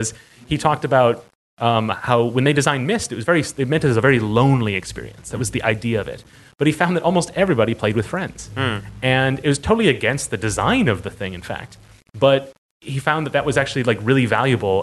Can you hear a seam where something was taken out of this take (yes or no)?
no